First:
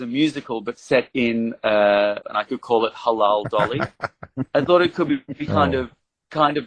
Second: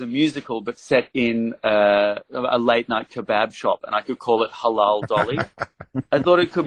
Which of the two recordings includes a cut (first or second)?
first